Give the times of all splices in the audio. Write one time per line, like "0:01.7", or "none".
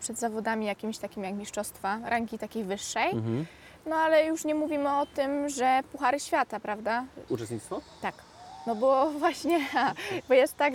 0:07.3